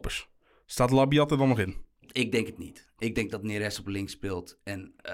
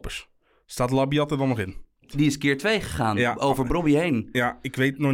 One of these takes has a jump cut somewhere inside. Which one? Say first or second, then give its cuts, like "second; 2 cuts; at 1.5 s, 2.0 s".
second; 1 cut; at 2.1 s